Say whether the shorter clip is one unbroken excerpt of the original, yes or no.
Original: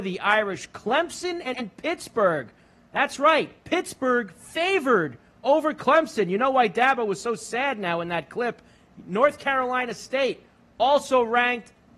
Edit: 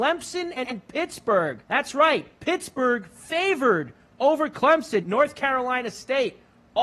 no